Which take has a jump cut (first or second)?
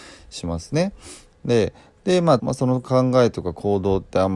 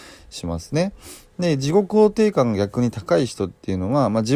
first